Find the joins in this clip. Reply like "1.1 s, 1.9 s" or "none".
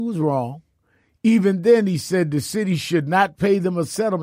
none